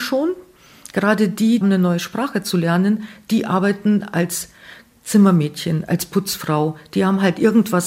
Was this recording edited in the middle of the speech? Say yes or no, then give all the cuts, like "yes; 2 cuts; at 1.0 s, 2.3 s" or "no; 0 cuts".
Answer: yes; 1 cut; at 1.6 s